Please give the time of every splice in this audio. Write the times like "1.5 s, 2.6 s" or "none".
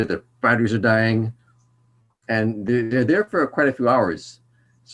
none